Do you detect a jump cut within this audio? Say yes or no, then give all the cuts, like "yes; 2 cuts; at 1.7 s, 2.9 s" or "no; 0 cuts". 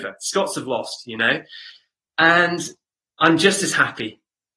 no; 0 cuts